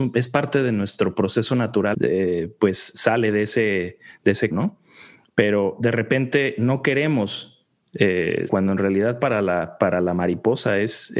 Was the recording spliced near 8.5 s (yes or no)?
yes